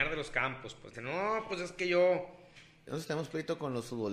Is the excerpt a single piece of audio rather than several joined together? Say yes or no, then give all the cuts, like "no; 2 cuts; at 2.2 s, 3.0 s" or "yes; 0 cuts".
no; 2 cuts; at 0.9 s, 2.9 s